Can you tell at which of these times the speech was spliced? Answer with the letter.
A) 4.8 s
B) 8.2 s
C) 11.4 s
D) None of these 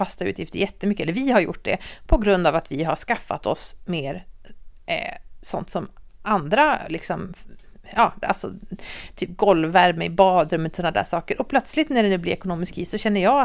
B